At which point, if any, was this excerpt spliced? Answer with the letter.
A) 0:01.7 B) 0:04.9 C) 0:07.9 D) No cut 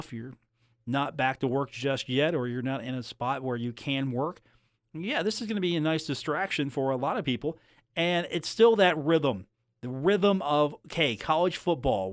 D